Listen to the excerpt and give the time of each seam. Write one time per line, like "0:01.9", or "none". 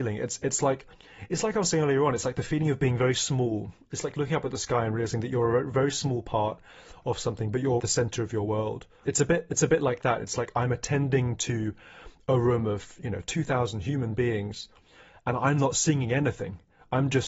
0:07.8
0:09.0